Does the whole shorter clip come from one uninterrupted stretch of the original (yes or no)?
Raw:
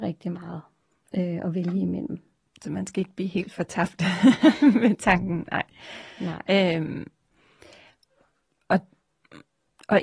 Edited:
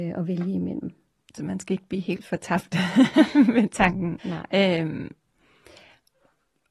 no